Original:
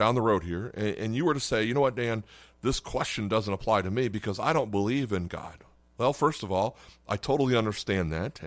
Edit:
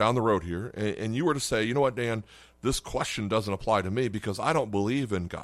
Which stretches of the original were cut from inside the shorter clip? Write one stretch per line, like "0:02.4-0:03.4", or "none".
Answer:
none